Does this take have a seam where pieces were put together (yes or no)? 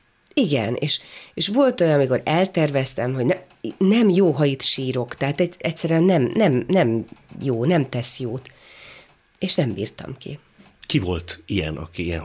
no